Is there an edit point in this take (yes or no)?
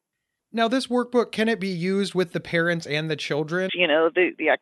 yes